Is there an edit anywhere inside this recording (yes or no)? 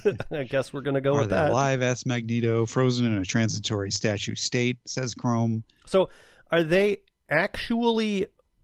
no